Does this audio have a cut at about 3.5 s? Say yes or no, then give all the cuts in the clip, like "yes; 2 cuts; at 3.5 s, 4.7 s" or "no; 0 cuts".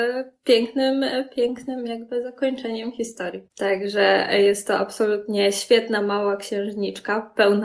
yes; 1 cut; at 3.5 s